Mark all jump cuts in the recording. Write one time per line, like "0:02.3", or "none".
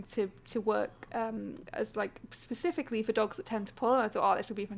none